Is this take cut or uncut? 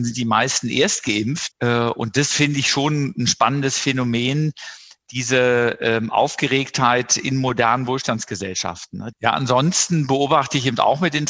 cut